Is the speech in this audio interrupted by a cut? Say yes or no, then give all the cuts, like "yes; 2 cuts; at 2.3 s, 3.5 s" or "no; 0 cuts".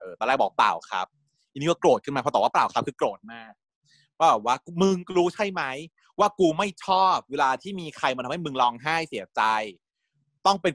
no; 0 cuts